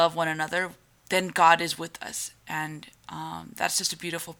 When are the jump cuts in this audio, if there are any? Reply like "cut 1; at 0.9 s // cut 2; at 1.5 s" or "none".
none